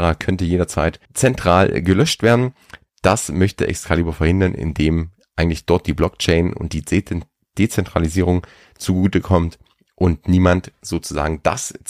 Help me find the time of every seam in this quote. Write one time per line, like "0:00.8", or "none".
0:01.0